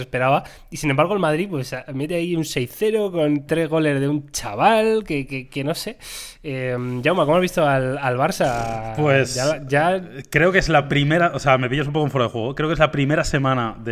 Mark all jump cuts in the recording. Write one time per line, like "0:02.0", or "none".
none